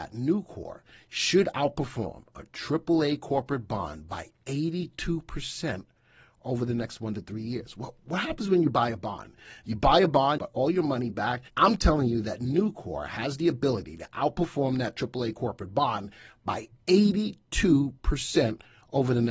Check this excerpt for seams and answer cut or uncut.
cut